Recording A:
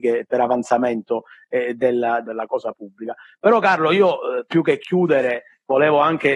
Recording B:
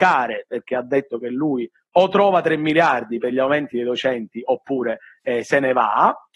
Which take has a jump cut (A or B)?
A